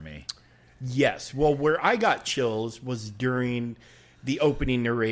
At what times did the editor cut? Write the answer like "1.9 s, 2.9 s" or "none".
none

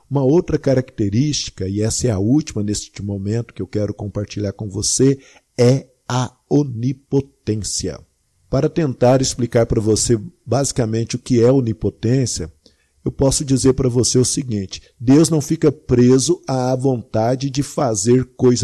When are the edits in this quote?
none

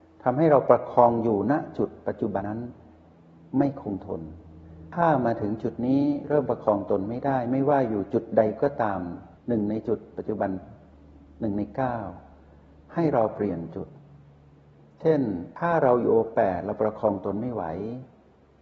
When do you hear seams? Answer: 2.4 s, 9.4 s

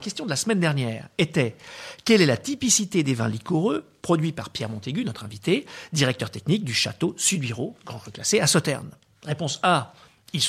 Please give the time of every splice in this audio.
none

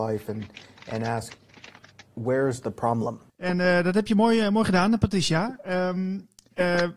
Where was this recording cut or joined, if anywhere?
3.3 s

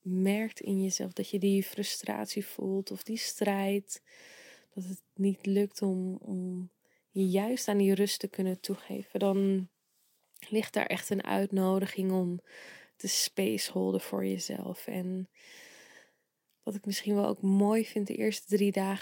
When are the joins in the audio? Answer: none

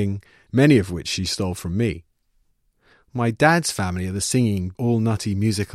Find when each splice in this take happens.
2.9 s, 4.8 s

